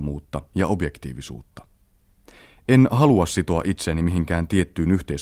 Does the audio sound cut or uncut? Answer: uncut